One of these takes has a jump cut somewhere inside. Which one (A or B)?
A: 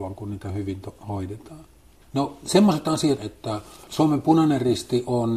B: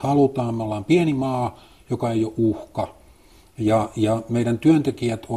A